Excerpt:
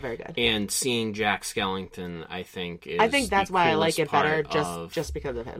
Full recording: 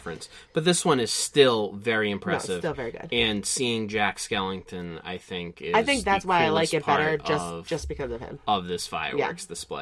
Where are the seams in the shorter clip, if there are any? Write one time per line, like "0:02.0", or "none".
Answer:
none